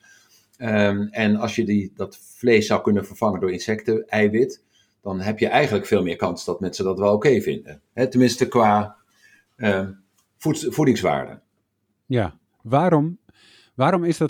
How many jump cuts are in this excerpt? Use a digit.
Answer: 1